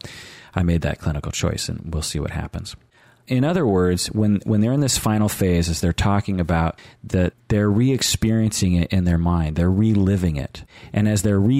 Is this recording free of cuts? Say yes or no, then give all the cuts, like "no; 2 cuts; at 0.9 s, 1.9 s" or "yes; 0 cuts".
no; 1 cut; at 7.3 s